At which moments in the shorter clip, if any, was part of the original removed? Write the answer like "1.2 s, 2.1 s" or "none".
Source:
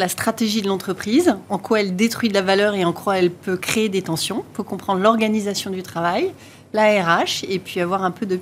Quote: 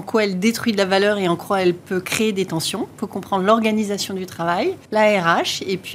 4.8 s